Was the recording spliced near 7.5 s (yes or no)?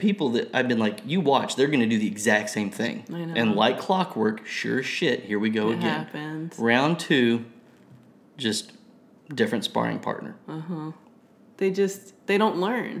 no